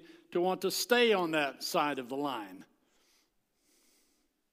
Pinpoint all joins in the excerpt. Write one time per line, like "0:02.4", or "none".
none